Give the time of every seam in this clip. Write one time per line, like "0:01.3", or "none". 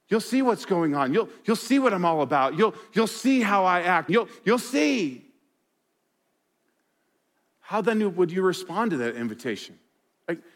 0:04.1